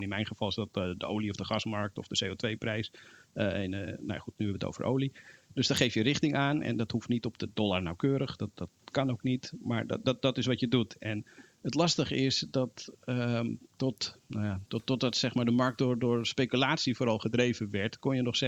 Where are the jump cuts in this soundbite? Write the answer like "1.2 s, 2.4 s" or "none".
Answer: none